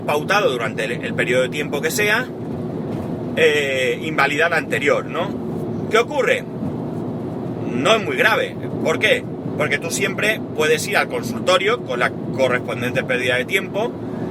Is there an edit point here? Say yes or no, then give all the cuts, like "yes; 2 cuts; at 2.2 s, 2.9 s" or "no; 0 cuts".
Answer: no; 0 cuts